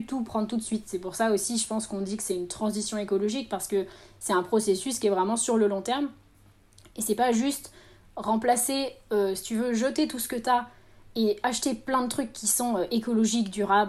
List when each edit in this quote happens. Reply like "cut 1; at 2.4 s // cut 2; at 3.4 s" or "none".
none